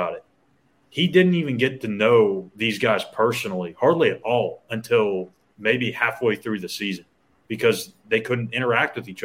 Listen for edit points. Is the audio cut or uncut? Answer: uncut